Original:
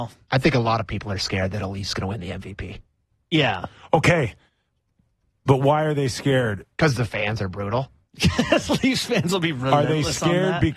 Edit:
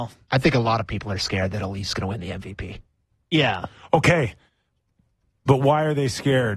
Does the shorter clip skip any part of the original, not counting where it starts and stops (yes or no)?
no